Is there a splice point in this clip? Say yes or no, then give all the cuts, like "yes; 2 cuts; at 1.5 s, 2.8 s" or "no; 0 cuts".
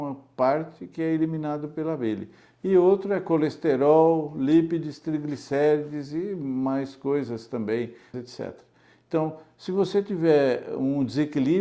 yes; 1 cut; at 8.1 s